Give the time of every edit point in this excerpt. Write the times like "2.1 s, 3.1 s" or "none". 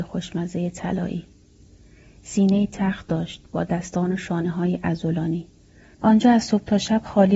5.9 s